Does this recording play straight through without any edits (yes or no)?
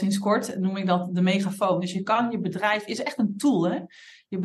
yes